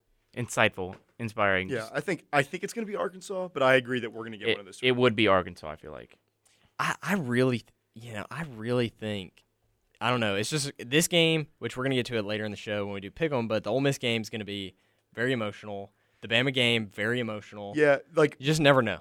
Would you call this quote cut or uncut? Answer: uncut